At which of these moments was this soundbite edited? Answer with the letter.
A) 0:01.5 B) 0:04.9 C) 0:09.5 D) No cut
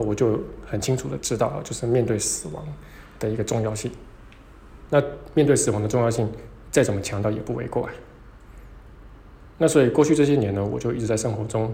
B